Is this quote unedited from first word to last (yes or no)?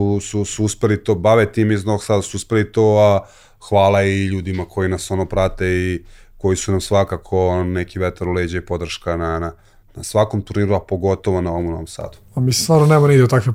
yes